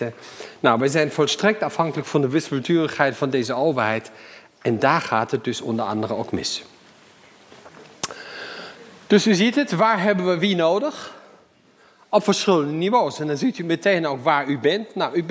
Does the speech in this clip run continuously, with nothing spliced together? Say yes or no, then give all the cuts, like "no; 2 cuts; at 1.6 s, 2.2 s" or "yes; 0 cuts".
yes; 0 cuts